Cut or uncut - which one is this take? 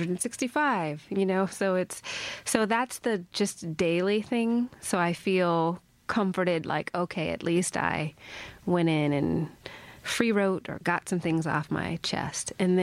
uncut